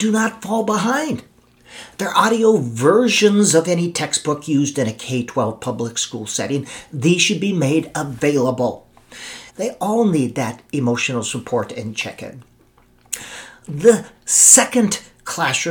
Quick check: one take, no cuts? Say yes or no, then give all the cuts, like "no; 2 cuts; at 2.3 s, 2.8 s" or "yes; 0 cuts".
no; 1 cut; at 9.5 s